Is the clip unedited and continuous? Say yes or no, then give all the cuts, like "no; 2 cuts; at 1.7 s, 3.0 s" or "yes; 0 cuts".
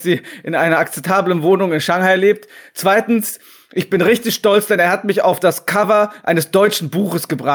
yes; 0 cuts